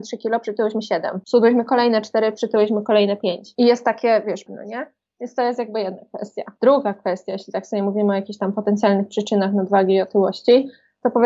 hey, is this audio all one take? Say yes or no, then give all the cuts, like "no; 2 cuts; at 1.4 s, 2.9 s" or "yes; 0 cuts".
no; 1 cut; at 4.5 s